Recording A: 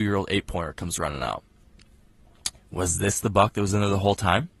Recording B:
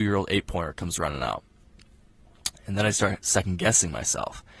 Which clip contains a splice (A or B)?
A